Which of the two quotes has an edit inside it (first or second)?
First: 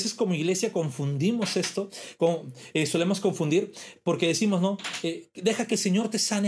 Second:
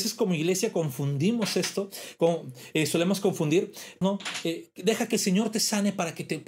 second